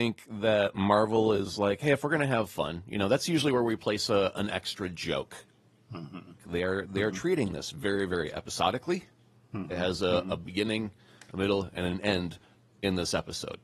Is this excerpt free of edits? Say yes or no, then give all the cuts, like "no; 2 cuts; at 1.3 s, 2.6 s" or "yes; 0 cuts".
no; 1 cut; at 6.4 s